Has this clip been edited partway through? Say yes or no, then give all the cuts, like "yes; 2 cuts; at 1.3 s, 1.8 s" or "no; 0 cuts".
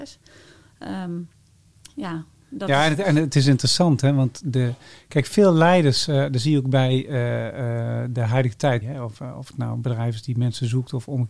yes; 1 cut; at 8.8 s